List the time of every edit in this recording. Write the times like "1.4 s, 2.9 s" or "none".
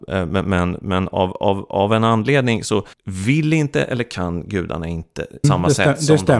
2.9 s, 5.4 s